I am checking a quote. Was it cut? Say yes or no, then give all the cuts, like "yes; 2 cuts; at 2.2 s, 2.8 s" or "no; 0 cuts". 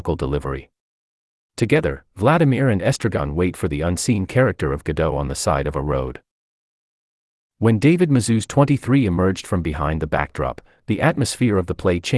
no; 0 cuts